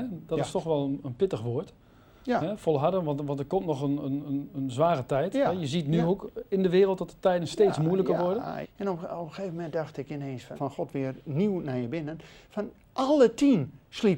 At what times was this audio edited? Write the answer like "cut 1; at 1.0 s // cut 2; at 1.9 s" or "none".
cut 1; at 8.6 s // cut 2; at 10.6 s